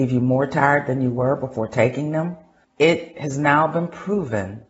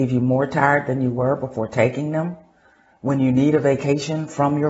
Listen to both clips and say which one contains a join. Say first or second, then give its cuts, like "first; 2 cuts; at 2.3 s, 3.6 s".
first; 1 cut; at 2.6 s